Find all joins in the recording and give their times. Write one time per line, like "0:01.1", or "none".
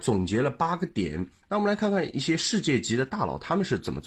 0:01.4